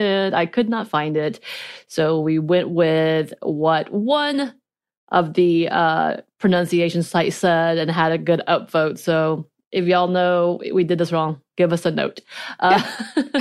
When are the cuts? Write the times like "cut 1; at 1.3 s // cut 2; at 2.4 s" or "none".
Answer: cut 1; at 11.5 s

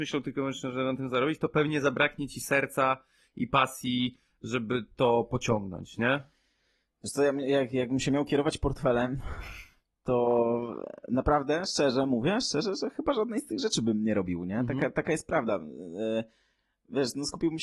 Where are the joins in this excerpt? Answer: none

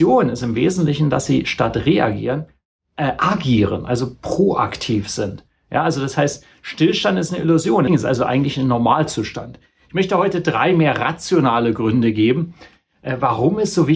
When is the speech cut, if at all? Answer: cut 1; at 7.9 s

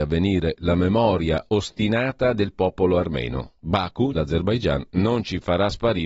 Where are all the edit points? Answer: cut 1; at 4.1 s

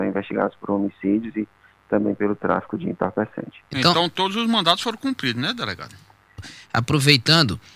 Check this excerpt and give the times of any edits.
cut 1; at 6.4 s

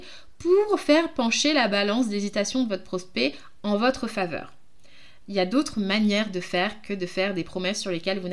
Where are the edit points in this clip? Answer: none

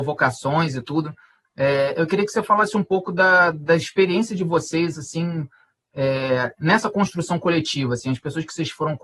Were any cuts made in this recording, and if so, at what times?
none

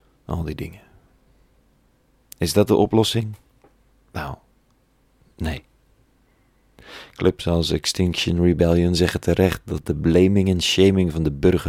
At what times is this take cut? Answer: none

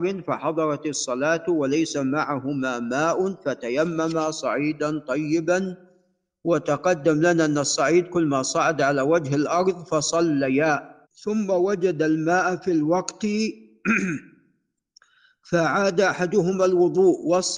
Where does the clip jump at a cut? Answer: cut 1; at 11.0 s

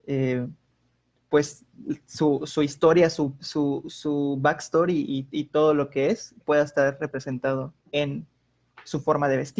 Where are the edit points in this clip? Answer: cut 1; at 6.4 s // cut 2; at 7.8 s

